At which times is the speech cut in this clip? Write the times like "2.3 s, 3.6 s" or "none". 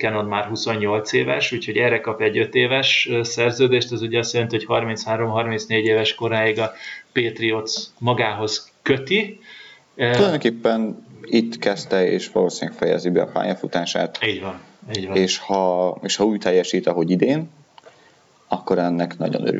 none